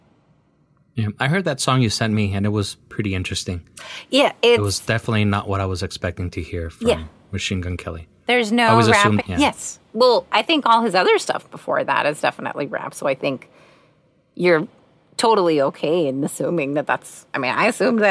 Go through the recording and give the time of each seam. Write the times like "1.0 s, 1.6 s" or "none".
9.2 s